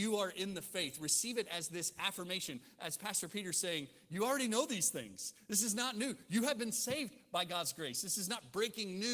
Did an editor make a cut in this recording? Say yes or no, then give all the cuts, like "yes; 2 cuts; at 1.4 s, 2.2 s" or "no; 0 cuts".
no; 0 cuts